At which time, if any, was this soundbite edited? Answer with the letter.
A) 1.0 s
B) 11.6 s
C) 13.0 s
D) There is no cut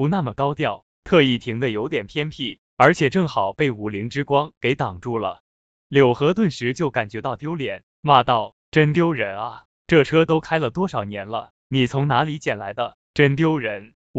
C